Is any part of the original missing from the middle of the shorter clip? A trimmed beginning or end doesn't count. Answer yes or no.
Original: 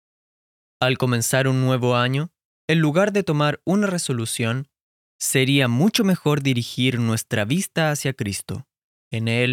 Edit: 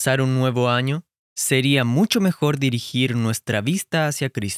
yes